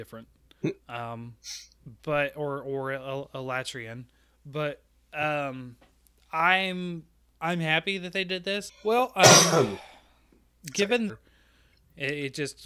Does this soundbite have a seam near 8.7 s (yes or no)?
yes